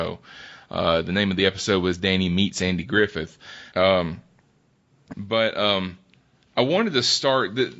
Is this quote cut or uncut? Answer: cut